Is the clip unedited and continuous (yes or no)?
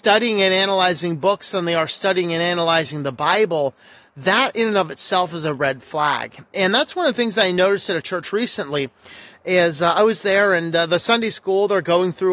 yes